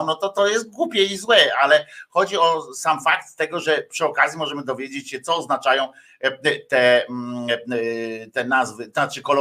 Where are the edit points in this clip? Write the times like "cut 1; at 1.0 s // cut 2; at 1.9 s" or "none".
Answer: none